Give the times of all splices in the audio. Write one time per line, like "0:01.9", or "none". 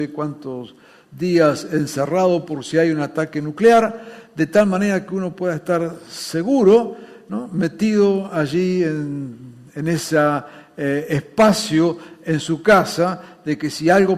none